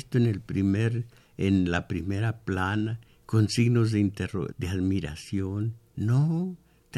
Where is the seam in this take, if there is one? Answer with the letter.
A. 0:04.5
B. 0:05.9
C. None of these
A